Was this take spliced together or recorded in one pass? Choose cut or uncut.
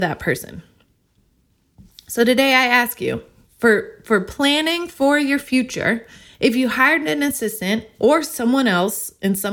uncut